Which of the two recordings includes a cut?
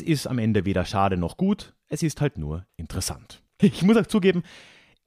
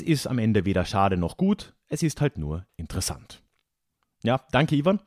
first; 1 cut; at 3.6 s

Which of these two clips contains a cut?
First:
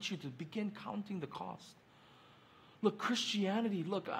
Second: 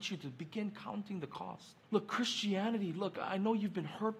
second; 1 cut; at 1.8 s

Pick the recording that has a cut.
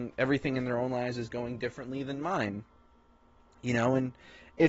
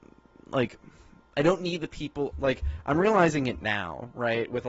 second; 1 cut; at 2.3 s

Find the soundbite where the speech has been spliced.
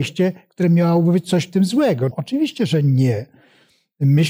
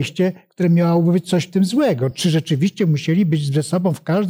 first; 1 cut; at 2.1 s

